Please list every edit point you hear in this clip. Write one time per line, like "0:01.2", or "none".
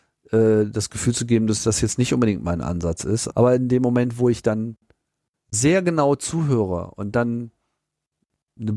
0:03.3